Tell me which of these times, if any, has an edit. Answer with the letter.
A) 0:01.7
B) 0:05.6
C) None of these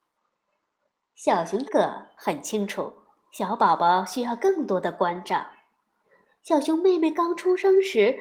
A